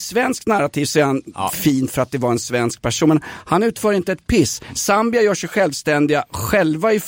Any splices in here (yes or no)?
no